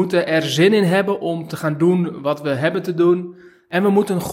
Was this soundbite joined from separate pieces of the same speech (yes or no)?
no